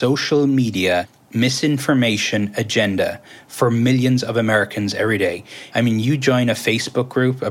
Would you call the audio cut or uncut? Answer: cut